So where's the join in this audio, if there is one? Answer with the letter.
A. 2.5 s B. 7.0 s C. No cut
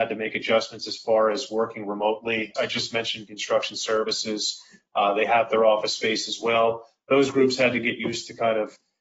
A